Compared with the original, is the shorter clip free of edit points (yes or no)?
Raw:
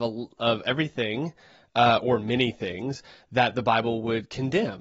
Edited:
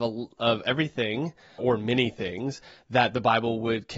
no